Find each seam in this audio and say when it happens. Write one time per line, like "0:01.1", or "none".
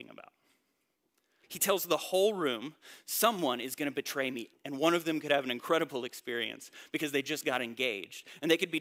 0:01.4
0:04.5

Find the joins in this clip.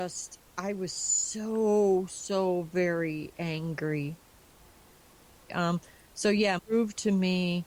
0:05.5
0:06.6

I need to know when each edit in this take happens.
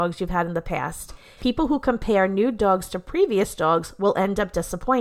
0:01.4

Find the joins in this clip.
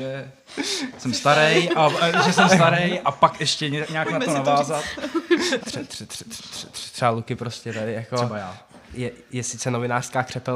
0:05.6

